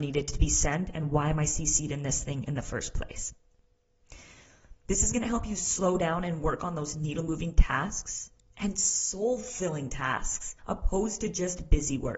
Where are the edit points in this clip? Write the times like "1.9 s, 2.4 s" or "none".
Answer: 4.8 s, 10.6 s

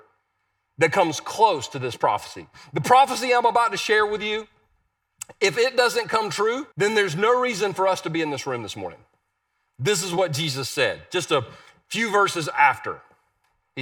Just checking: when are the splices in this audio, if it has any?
6.7 s

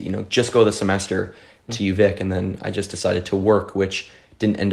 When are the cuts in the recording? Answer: 1.7 s

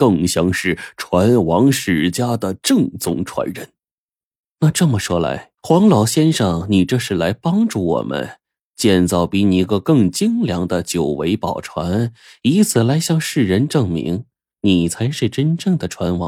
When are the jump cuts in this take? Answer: 4.4 s, 5.6 s, 9.7 s

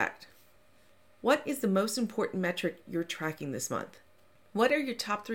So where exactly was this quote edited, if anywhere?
none

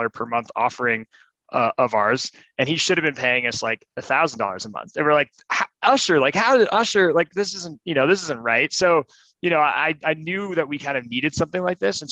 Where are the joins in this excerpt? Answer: none

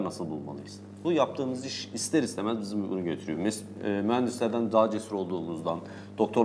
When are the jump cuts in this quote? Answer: 1.0 s

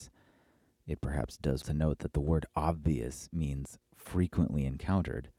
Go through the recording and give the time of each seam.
1.6 s

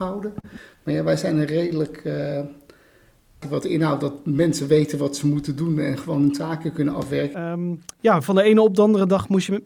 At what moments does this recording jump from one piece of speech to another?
3.4 s, 7.3 s

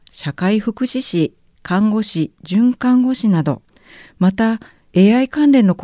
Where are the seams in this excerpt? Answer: none

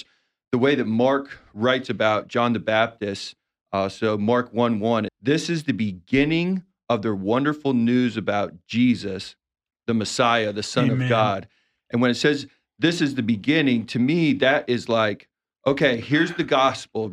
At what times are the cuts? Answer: 5.1 s

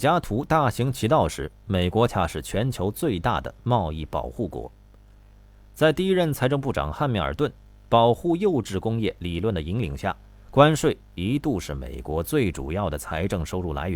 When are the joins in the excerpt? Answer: 2.1 s

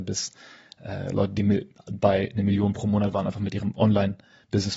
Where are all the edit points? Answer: none

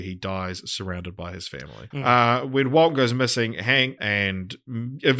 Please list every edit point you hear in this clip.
1.9 s, 4.0 s

